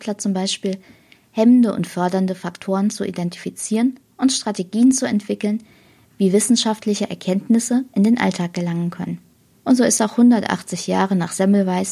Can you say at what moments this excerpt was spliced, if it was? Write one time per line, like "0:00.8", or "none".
0:09.5